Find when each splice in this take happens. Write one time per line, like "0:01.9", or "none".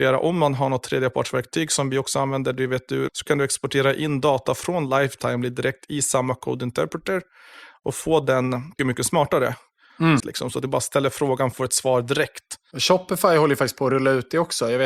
0:03.1
0:08.8
0:10.2